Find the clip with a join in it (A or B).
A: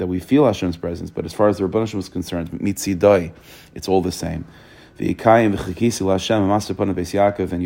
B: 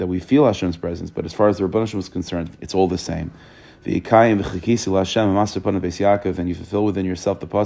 B